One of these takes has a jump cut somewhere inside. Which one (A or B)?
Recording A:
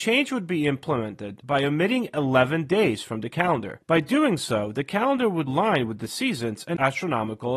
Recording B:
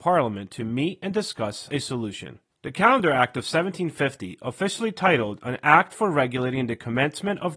A